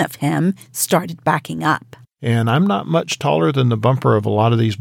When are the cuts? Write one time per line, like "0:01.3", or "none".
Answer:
none